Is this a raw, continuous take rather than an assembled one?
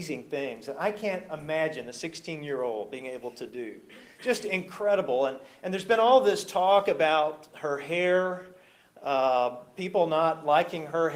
yes; 0 cuts

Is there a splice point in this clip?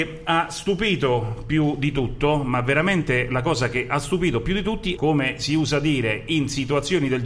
yes; 1 cut; at 5.0 s

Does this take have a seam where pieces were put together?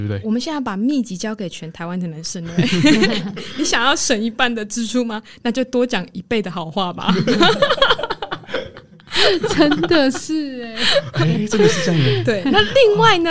no; 0 cuts

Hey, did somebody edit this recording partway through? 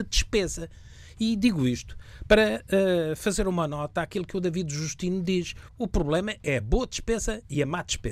yes; 1 cut; at 5.7 s

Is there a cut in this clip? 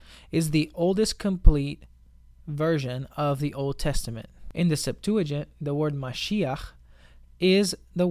no; 0 cuts

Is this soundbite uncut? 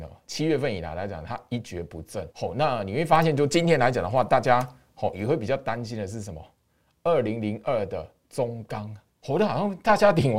no; 1 cut; at 2.3 s

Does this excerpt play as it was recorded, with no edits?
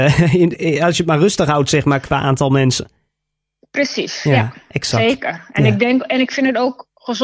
yes; 0 cuts

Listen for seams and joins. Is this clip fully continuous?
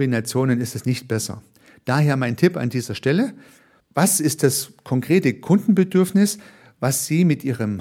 no; 1 cut; at 3.8 s

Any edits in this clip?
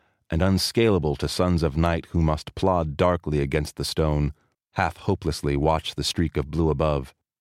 yes; 1 cut; at 4.5 s

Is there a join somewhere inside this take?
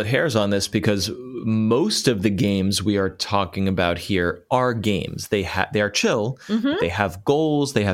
no; 0 cuts

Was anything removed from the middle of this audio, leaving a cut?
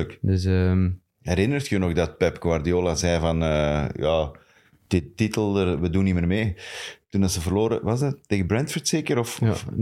no; 0 cuts

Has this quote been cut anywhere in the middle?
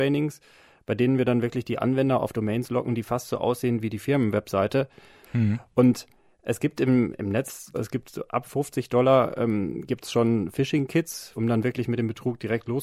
yes; 3 cuts; at 5.2 s, 7.7 s, 11.3 s

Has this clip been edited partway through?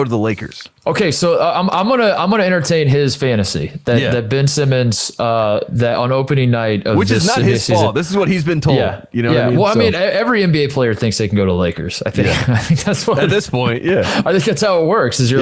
no; 0 cuts

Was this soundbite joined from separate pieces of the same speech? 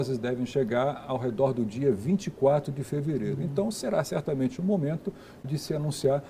no; 0 cuts

